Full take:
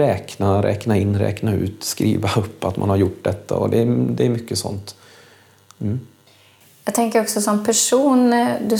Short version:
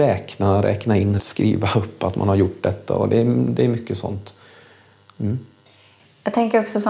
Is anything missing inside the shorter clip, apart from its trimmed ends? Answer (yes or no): yes